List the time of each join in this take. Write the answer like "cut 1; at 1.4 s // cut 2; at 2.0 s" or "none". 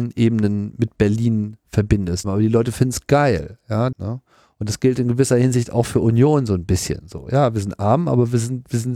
cut 1; at 2.2 s // cut 2; at 3.9 s